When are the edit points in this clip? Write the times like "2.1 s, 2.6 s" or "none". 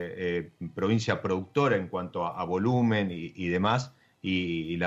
none

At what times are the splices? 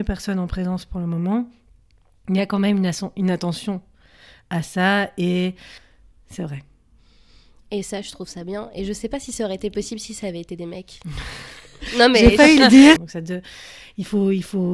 13.0 s

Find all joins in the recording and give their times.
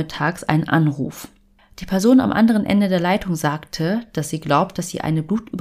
none

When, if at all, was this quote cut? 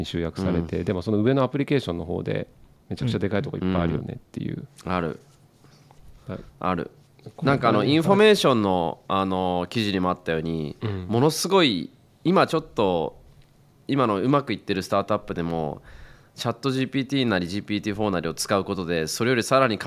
none

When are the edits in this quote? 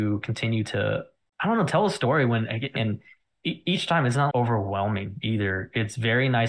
2.8 s, 4.3 s

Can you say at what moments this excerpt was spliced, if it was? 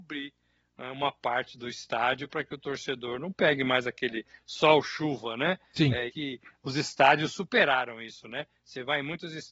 6.1 s

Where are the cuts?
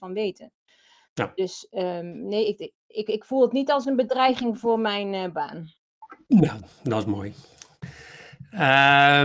2.7 s

